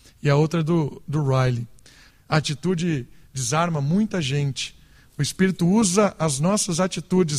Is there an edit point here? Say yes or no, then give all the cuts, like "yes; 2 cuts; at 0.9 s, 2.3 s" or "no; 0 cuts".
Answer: yes; 1 cut; at 2.1 s